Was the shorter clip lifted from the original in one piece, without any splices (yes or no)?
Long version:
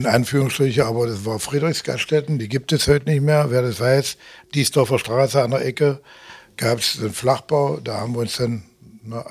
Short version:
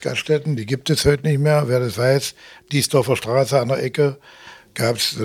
yes